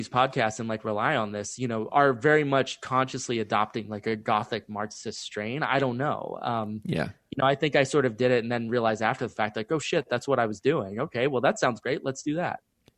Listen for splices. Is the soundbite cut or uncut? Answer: uncut